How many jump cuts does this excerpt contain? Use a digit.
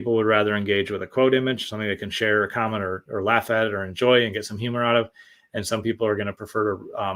0